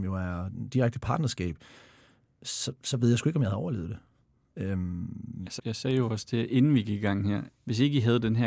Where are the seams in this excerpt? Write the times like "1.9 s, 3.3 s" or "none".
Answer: 5.6 s, 7.5 s

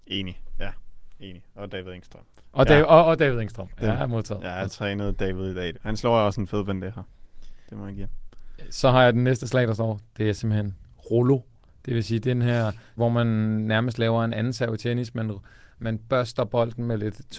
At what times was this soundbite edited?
5.7 s, 13.0 s

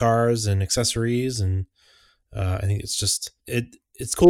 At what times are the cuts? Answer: 3.4 s

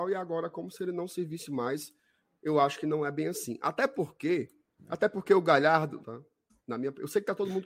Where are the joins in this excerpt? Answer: 4.8 s, 6.0 s

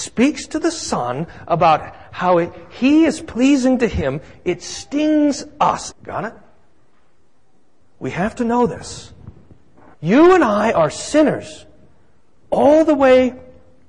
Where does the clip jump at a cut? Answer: 5.9 s, 9.9 s

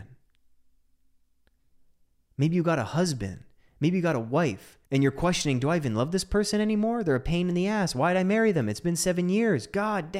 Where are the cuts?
4.9 s

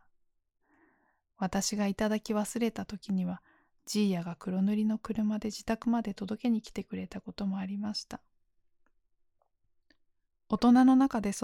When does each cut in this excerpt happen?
none

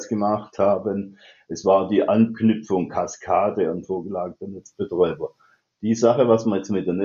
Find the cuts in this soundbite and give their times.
none

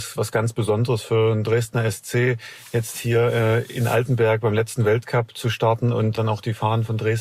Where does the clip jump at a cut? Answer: 6.2 s

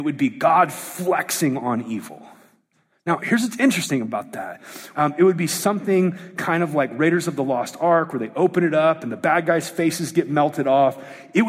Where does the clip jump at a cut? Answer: 4.9 s

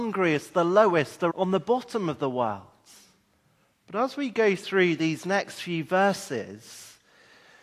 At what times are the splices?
1.3 s

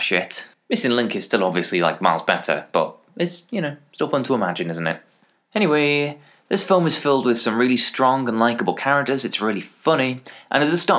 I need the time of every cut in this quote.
none

